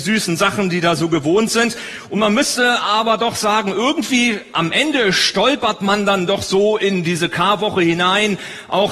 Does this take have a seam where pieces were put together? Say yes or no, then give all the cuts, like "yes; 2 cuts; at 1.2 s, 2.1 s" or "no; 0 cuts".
no; 0 cuts